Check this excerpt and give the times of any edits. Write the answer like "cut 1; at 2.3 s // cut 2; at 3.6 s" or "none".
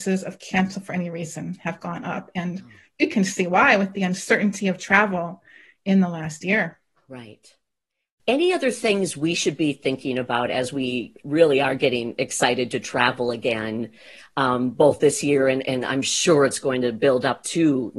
none